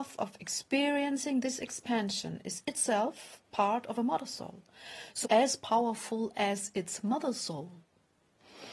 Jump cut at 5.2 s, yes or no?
yes